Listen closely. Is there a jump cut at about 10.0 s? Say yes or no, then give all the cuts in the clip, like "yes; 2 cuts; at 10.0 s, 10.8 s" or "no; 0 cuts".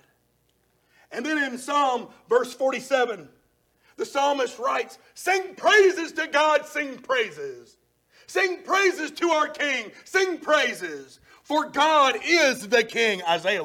no; 0 cuts